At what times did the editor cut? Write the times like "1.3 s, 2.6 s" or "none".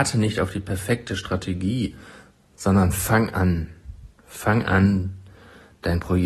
3.3 s